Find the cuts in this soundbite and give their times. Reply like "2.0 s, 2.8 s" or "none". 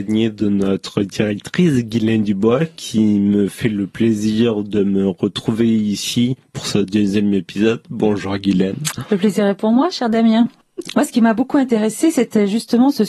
10.9 s